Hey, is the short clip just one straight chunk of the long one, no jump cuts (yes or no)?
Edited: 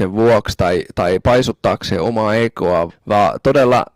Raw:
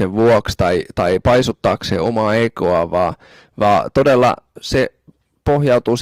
no